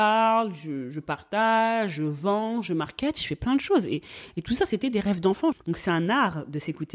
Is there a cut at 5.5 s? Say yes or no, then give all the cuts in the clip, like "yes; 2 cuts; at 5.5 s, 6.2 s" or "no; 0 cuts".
yes; 1 cut; at 5.5 s